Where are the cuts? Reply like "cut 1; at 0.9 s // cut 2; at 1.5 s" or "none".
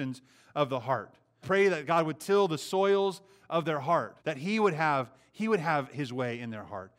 cut 1; at 1.4 s // cut 2; at 4.2 s